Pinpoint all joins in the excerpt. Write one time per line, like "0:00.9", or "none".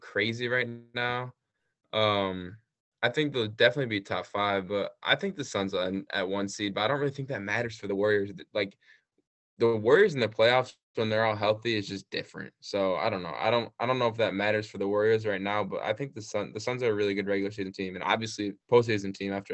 0:18.6